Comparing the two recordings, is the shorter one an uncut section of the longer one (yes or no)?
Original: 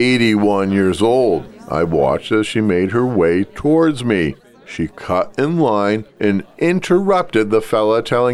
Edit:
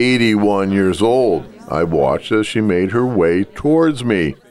yes